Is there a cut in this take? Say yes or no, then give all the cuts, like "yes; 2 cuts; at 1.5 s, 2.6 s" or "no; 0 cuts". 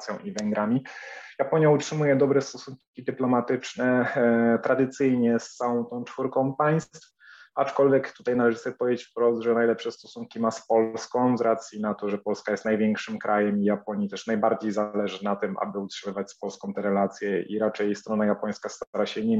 no; 0 cuts